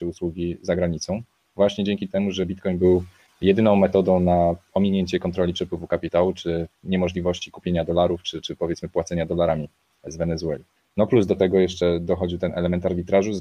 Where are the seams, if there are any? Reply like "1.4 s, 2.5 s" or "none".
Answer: none